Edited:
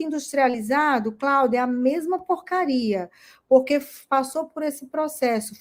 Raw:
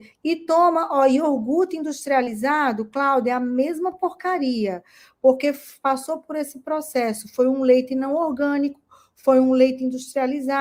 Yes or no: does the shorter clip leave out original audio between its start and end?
no